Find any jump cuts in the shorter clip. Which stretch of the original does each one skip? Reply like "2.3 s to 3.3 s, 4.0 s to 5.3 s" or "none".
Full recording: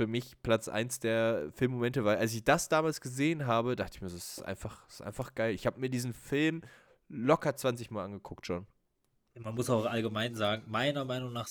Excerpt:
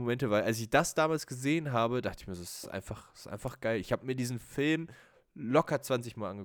none